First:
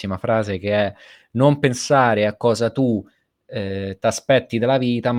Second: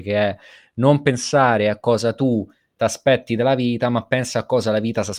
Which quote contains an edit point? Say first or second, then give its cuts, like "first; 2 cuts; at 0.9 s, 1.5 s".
second; 1 cut; at 2.8 s